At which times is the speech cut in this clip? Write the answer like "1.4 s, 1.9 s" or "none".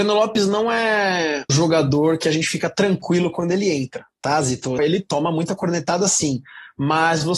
1.5 s, 4.8 s